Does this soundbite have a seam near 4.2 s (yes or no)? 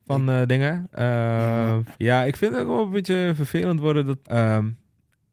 yes